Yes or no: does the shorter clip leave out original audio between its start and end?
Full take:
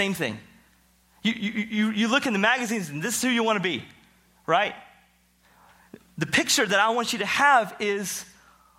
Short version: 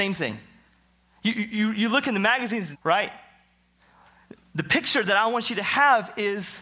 yes